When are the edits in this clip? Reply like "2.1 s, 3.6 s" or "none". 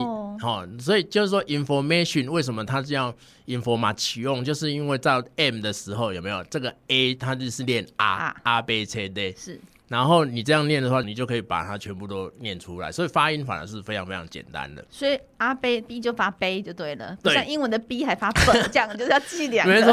11.0 s